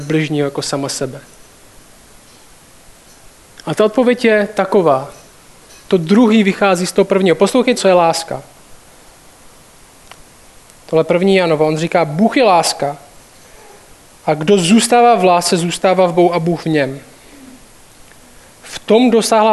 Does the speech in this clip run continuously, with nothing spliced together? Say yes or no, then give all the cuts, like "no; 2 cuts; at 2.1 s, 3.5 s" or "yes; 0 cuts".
no; 1 cut; at 7.7 s